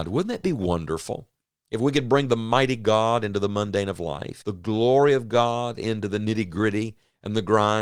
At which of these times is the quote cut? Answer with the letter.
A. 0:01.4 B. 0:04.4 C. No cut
B